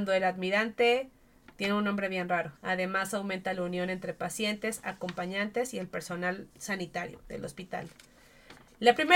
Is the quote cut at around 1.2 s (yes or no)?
no